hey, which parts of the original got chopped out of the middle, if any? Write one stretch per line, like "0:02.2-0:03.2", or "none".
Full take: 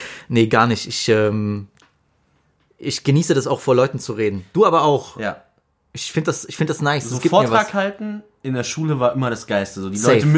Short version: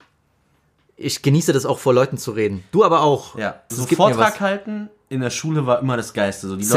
0:05.5-0:07.0